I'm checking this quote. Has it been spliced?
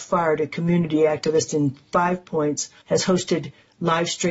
yes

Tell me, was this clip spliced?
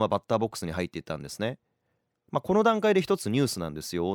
no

